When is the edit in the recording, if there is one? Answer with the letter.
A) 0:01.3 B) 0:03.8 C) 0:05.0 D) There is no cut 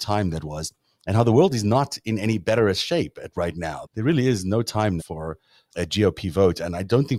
C